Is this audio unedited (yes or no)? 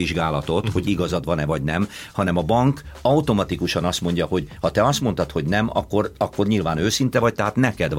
yes